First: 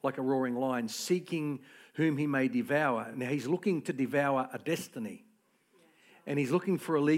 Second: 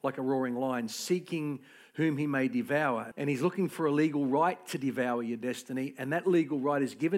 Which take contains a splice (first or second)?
second